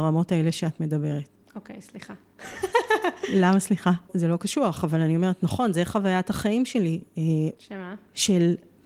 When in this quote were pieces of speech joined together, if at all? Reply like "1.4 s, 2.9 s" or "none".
4.1 s, 7.6 s